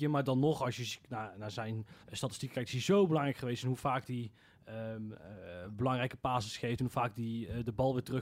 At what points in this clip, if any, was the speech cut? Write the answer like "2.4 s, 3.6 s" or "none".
2.0 s